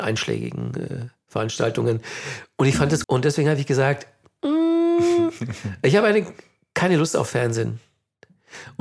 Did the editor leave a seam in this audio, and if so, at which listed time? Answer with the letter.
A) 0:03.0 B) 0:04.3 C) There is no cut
A